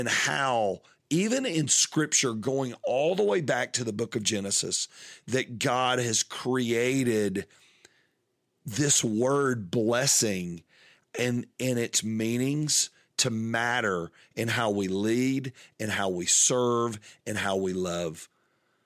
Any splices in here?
no; 0 cuts

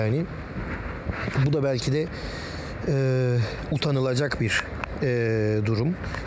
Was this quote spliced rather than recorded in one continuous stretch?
no; 0 cuts

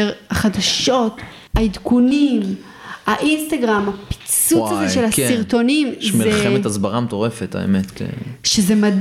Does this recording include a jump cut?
yes; 1 cut; at 1.5 s

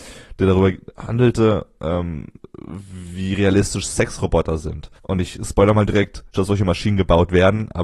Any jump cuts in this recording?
yes; 2 cuts; at 5.0 s, 6.3 s

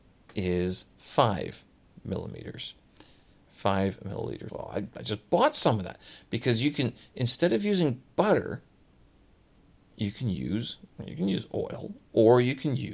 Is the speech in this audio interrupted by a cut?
yes; 2 cuts; at 3.5 s, 4.5 s

